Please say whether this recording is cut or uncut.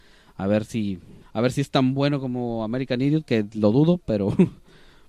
cut